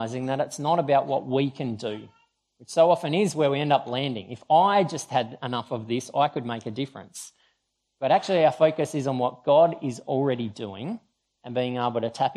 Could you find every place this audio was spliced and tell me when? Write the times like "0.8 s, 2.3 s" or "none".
none